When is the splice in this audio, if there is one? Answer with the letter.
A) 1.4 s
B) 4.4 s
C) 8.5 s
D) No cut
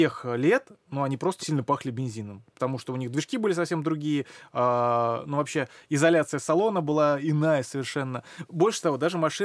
A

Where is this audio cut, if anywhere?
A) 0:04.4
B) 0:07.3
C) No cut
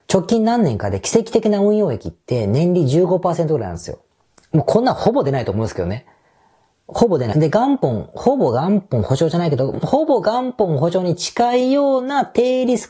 B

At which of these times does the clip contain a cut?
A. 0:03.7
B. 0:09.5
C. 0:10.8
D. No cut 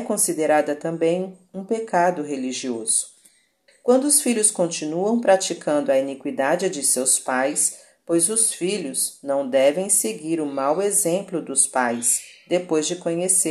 A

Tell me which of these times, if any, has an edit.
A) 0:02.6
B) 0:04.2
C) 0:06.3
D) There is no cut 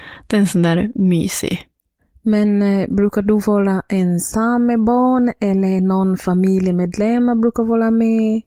D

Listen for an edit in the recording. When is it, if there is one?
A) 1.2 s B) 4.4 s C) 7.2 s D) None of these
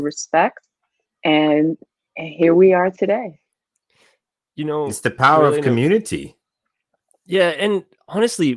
D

